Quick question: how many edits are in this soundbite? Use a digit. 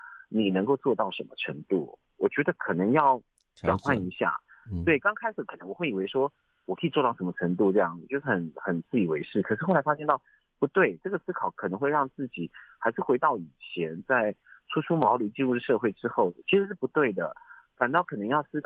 1